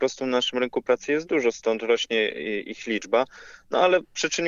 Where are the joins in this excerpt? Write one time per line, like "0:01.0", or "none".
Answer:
0:01.5